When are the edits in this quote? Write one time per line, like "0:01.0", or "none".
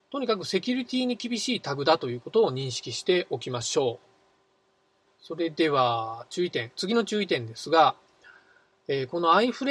0:05.1